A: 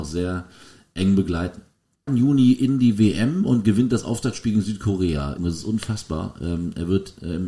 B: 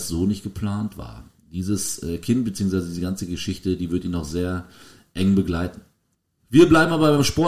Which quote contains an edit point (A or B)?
A